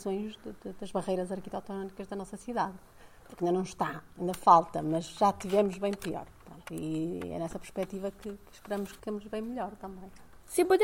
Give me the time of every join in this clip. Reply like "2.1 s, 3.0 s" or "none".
none